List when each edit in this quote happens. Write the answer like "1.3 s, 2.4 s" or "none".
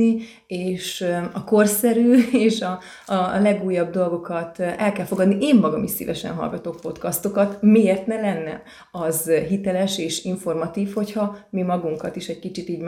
none